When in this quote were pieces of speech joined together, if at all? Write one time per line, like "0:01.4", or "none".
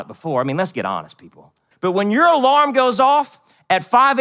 0:01.7